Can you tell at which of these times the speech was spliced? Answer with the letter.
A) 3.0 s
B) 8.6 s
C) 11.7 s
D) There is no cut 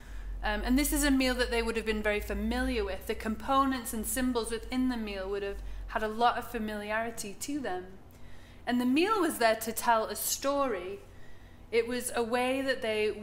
D